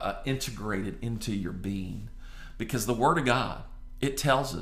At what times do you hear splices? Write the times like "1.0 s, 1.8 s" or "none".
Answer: none